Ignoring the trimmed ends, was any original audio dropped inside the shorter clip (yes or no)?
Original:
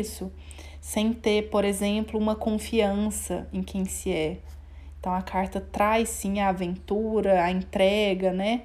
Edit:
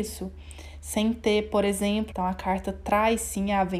yes